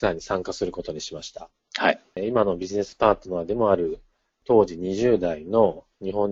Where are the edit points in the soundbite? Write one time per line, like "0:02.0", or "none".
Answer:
0:02.1